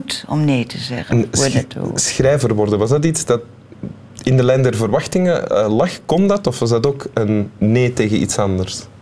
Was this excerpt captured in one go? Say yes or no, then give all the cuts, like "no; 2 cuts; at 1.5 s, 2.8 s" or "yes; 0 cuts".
no; 1 cut; at 1.1 s